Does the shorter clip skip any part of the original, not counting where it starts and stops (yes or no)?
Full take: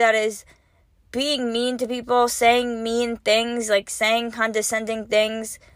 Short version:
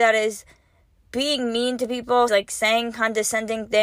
yes